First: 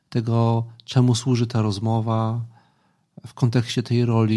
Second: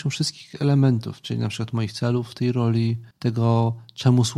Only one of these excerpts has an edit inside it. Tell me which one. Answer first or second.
second